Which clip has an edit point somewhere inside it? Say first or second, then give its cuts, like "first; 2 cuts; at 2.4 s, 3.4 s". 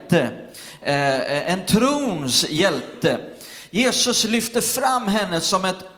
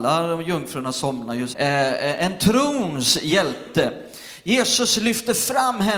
second; 1 cut; at 1.5 s